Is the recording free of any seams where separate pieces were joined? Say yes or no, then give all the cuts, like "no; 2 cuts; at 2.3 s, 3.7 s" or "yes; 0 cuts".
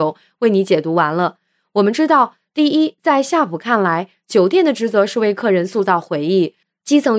yes; 0 cuts